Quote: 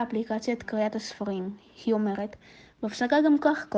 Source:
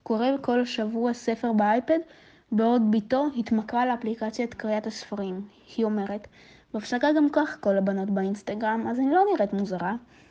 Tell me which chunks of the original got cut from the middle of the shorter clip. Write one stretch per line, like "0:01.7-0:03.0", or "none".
none